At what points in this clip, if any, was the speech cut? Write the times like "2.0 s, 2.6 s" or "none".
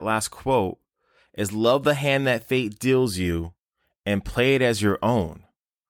none